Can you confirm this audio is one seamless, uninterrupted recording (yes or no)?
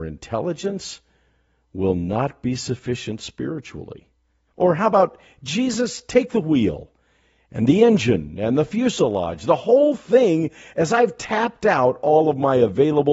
no